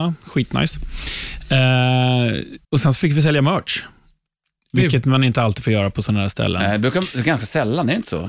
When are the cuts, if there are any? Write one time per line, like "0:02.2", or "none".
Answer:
0:02.6